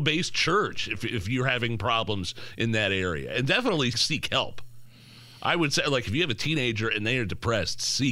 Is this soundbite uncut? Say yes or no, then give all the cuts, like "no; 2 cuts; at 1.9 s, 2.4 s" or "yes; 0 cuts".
no; 1 cut; at 3.9 s